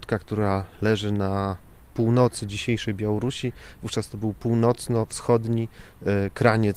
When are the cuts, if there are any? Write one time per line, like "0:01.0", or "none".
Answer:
none